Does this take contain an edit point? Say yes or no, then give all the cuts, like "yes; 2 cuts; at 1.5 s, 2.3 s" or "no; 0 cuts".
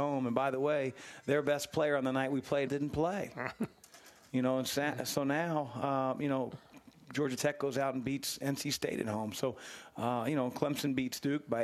yes; 1 cut; at 2.7 s